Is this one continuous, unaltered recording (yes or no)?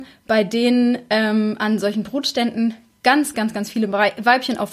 no